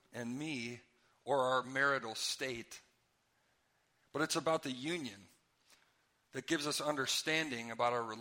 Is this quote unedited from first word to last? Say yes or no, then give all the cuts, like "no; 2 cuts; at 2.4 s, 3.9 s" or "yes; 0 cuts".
yes; 0 cuts